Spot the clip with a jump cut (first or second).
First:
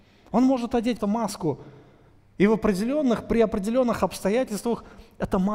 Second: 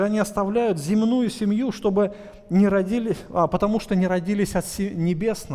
first